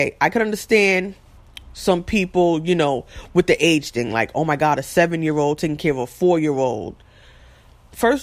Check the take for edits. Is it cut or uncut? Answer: uncut